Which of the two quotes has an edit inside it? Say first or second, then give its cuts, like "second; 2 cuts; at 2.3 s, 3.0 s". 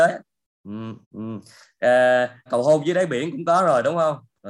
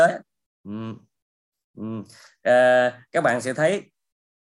first; 2 cuts; at 1.0 s, 2.5 s